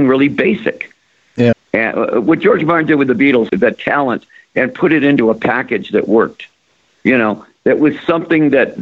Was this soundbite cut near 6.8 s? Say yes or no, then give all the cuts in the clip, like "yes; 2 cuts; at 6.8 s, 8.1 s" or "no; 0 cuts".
no; 2 cuts; at 1.5 s, 3.5 s